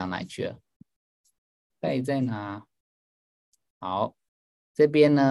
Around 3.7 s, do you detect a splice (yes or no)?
no